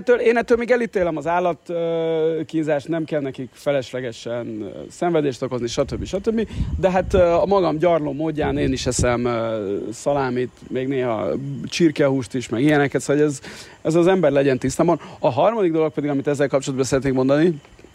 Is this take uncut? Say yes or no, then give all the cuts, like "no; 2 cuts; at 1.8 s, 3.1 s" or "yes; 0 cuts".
yes; 0 cuts